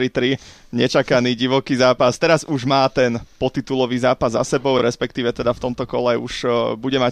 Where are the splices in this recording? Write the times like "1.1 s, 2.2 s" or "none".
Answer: none